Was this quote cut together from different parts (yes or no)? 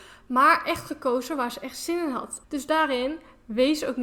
yes